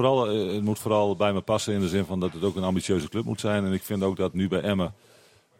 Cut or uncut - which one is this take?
cut